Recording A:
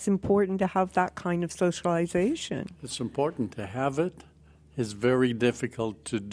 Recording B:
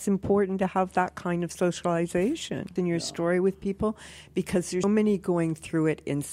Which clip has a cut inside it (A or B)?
B